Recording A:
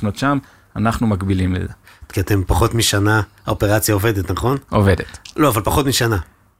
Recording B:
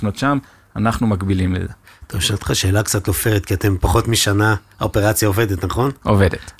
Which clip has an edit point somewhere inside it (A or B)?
A